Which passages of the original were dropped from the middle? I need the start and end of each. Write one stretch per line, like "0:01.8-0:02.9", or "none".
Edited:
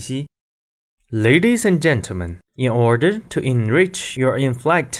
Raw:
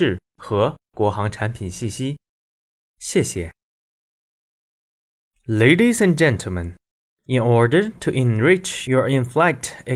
0:02.9-0:05.3
0:06.8-0:07.2